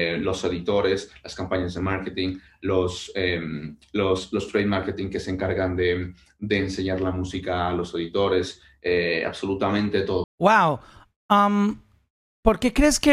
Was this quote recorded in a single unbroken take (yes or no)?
no